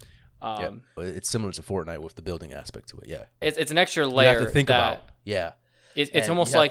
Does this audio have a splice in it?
yes; 2 cuts; at 1.0 s, 3.4 s

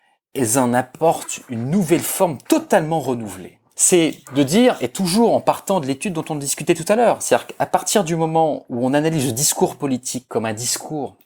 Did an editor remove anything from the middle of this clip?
yes; 1 cut; at 3.7 s

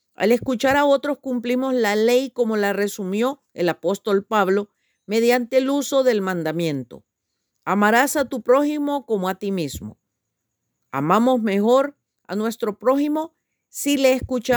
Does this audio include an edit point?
no; 0 cuts

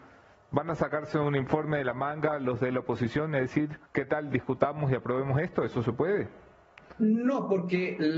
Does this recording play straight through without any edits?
no; 1 cut; at 3.9 s

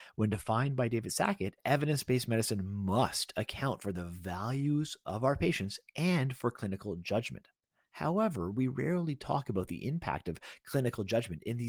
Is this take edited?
no; 0 cuts

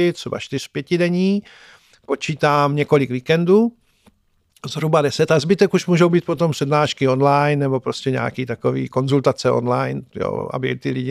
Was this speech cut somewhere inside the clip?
no; 0 cuts

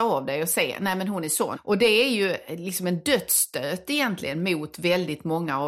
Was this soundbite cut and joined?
yes; 1 cut; at 1.6 s

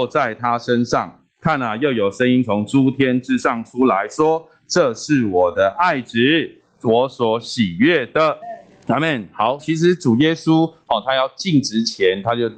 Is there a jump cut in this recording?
yes; 2 cuts; at 8.4 s, 9.6 s

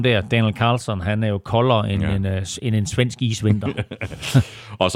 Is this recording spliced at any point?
no; 0 cuts

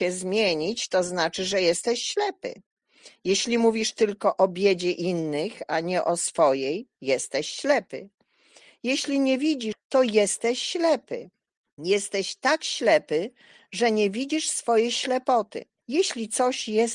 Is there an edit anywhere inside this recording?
yes; 2 cuts; at 9.7 s, 15.8 s

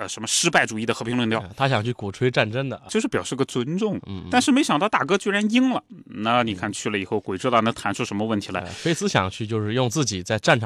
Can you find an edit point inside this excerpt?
yes; 1 cut; at 2.9 s

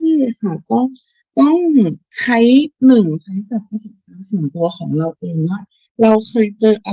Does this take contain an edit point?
no; 0 cuts

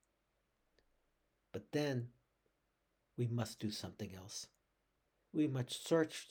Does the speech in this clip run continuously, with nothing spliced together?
no; 1 cut; at 5.3 s

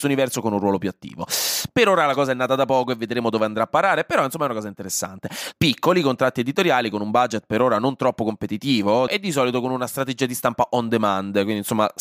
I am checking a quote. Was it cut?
yes; 2 cuts; at 5.5 s, 9.1 s

